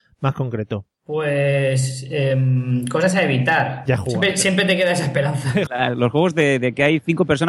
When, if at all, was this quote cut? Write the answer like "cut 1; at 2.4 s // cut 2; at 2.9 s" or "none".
cut 1; at 0.9 s // cut 2; at 3.9 s // cut 3; at 5.7 s